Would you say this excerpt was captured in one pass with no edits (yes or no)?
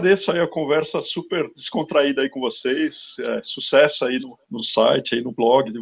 yes